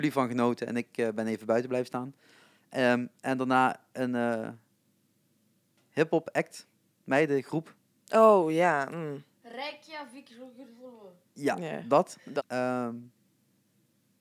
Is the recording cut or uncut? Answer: cut